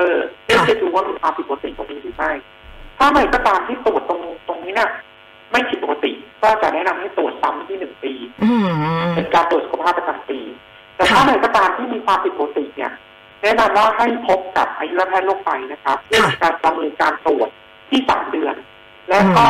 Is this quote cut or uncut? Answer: cut